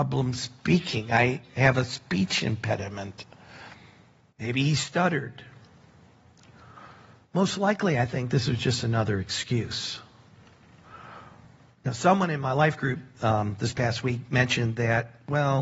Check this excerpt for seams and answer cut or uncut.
uncut